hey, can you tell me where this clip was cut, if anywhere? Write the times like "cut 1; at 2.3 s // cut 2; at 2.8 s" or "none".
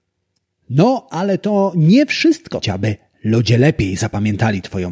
cut 1; at 2.6 s

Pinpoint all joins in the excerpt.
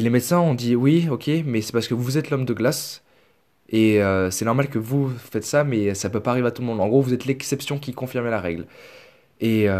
none

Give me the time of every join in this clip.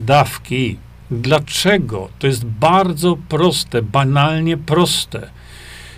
cut 1; at 1.0 s

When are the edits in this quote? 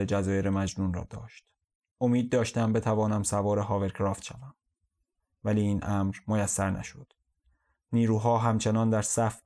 none

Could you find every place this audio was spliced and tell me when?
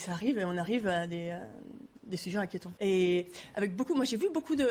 cut 1; at 2.8 s

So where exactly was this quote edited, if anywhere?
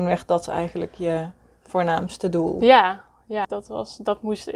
cut 1; at 3.4 s

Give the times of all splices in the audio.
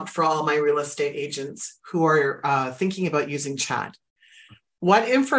none

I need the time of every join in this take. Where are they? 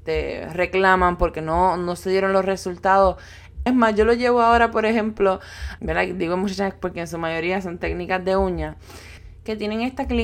cut 1; at 3.7 s // cut 2; at 5.8 s

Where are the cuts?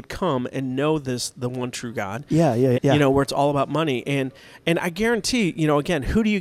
cut 1; at 2.7 s

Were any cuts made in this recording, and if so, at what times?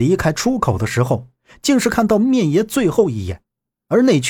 none

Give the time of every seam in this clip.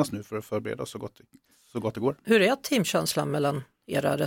none

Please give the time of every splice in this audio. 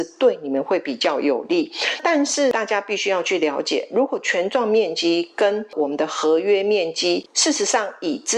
none

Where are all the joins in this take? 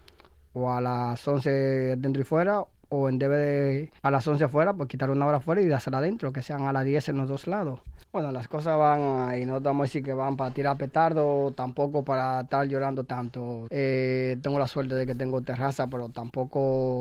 cut 1; at 4.0 s // cut 2; at 8.0 s // cut 3; at 13.7 s

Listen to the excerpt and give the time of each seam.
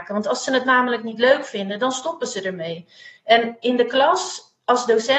none

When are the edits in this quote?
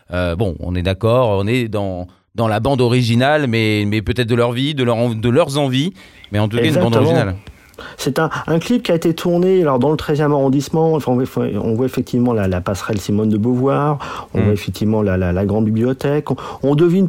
none

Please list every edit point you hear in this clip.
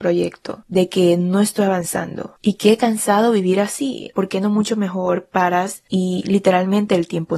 cut 1; at 4.1 s

